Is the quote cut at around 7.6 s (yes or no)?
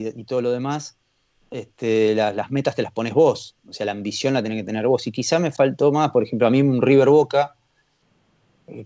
no